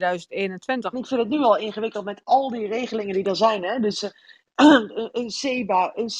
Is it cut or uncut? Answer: cut